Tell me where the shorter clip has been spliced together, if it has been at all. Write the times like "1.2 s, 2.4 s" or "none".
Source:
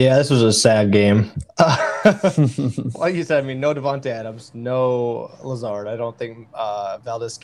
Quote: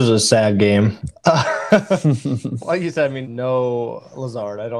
3.2 s